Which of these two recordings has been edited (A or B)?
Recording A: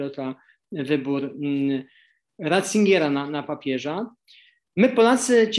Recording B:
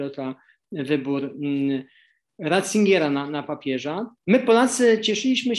B